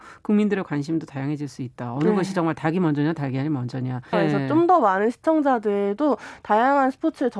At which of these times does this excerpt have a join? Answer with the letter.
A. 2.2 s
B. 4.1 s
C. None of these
B